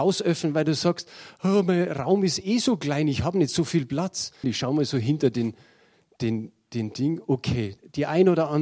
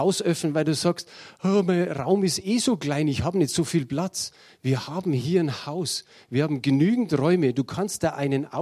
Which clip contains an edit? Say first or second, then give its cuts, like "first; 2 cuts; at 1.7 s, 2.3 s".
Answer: first; 1 cut; at 4.4 s